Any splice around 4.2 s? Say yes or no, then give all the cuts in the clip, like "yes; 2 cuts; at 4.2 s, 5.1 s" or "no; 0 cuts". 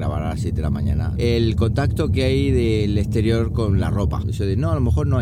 yes; 2 cuts; at 1.2 s, 4.2 s